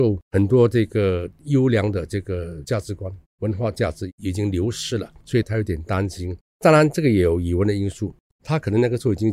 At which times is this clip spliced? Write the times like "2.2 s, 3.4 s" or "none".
5.4 s, 8.3 s